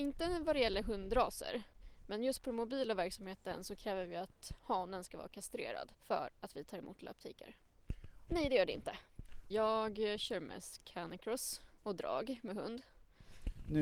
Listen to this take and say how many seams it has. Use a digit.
3